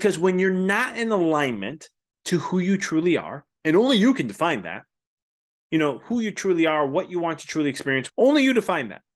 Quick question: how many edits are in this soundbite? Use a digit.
1